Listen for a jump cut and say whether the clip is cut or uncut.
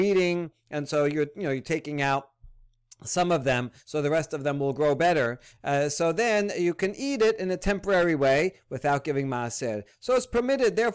uncut